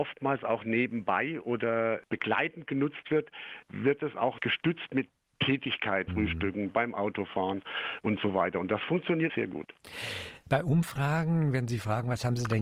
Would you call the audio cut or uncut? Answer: cut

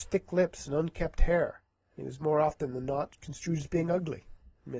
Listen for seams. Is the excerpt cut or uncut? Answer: uncut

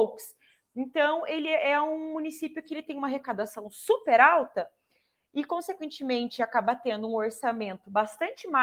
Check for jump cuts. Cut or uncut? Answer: uncut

